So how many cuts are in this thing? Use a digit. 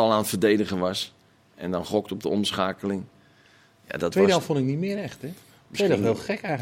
0